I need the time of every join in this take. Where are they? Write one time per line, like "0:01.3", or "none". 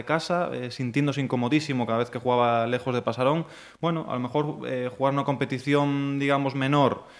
none